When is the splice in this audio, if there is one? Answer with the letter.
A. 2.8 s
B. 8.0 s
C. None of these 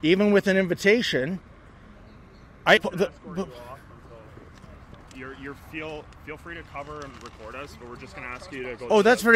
A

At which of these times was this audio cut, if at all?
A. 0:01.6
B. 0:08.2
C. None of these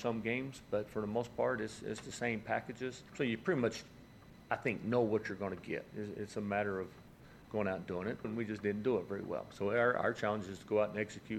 B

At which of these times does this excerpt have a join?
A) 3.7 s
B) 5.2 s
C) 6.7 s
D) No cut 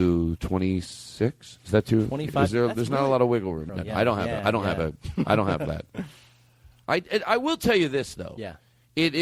A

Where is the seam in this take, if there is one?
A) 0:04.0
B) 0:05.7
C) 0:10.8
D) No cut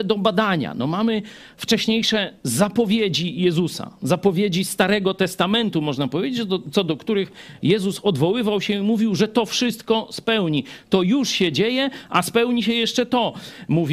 D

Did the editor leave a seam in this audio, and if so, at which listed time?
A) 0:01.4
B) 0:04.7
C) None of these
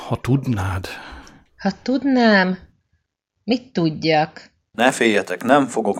B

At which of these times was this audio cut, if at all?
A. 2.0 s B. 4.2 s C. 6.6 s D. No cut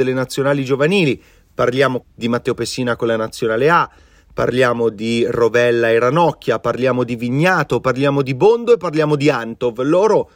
A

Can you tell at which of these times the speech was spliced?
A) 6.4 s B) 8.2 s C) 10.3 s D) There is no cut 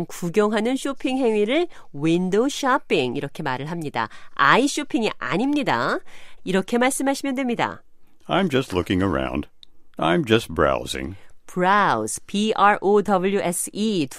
A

